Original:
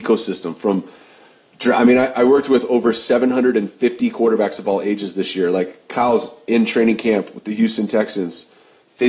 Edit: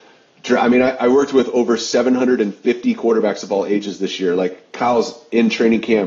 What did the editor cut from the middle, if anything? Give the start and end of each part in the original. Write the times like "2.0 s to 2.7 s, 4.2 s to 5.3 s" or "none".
none